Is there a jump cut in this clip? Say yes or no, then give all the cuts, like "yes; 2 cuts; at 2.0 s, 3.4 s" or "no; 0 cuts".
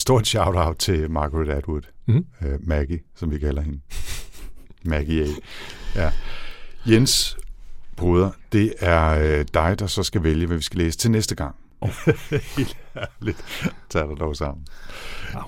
yes; 1 cut; at 11.8 s